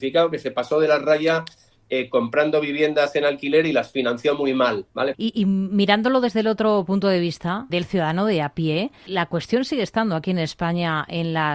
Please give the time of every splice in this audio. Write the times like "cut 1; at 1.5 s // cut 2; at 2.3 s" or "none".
cut 1; at 5.1 s // cut 2; at 7.7 s // cut 3; at 9.1 s